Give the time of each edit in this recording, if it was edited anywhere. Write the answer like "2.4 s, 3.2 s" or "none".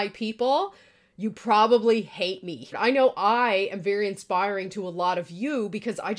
2.7 s

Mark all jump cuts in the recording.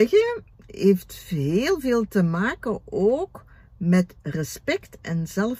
none

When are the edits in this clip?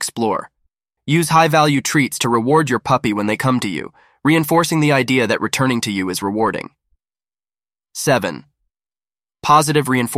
1.0 s

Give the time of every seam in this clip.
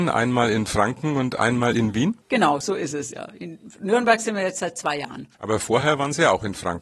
none

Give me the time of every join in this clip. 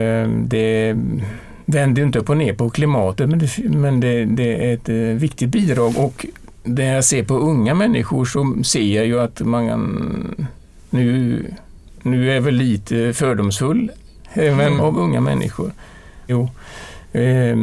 14.8 s, 16.3 s

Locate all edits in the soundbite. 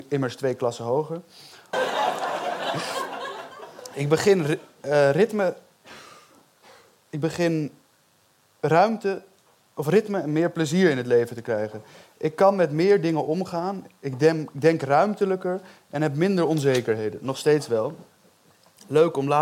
1.7 s

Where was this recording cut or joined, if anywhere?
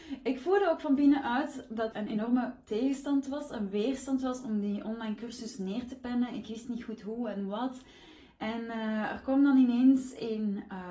1.9 s

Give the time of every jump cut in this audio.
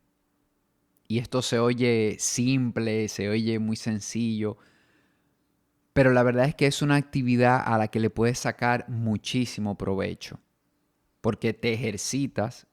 none

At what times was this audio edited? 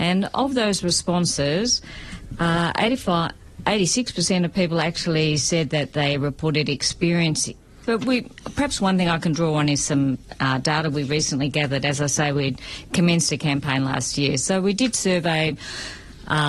7.8 s

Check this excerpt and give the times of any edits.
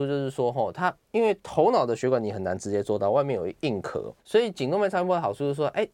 4.2 s

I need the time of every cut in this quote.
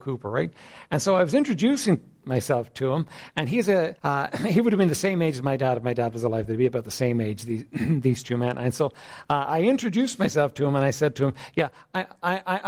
4.0 s

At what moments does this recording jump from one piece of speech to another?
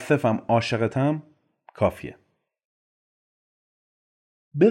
none

